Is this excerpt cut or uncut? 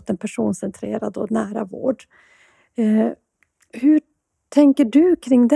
uncut